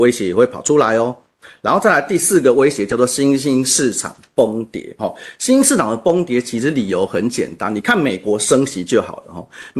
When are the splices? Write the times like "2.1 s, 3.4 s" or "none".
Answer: none

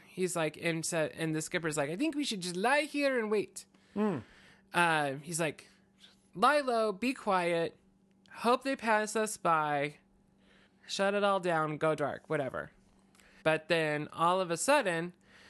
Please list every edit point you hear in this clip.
10.7 s, 13.4 s

